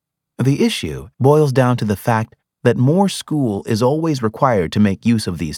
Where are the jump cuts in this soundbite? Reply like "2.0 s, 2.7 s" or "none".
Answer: 1.1 s